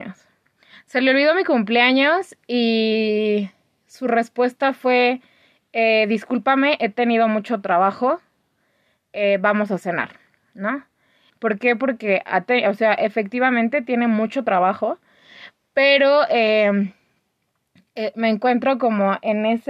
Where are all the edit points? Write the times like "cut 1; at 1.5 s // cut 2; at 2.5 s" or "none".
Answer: cut 1; at 11.3 s